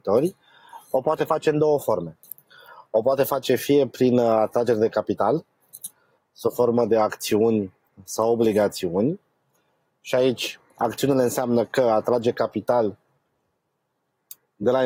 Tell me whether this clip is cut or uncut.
uncut